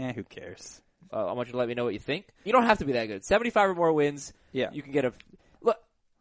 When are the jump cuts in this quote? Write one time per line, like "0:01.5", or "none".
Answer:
0:01.1
0:02.5